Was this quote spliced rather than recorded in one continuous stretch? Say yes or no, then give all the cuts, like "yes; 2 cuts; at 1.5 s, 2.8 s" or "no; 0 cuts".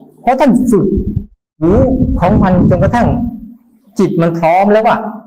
no; 0 cuts